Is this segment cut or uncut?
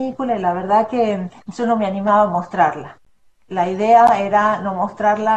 uncut